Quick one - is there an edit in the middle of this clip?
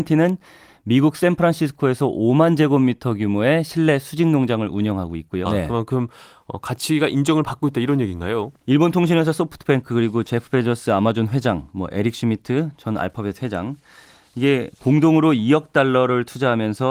yes; 2 cuts; at 5.5 s, 8.6 s

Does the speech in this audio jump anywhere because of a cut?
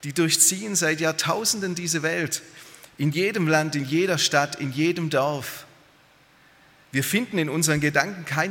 no; 0 cuts

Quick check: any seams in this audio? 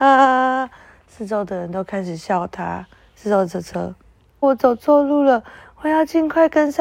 yes; 1 cut; at 4.4 s

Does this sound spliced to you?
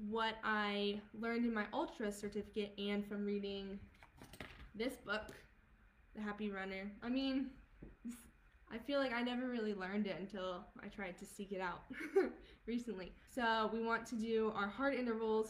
yes; 2 cuts; at 7.0 s, 13.3 s

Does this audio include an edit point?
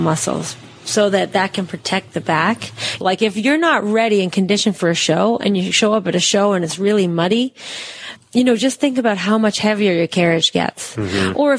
yes; 2 cuts; at 3.0 s, 8.2 s

